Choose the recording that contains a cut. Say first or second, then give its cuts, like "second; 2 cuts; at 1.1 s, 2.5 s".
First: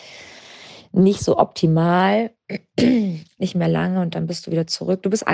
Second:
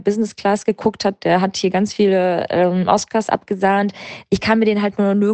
first; 1 cut; at 3.4 s